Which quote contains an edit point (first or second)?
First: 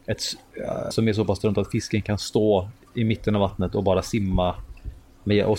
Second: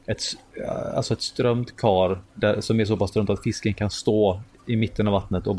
first